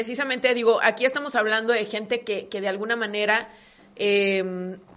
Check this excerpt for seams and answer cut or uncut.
uncut